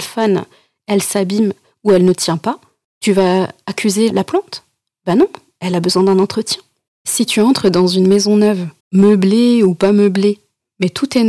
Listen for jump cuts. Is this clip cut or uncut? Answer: cut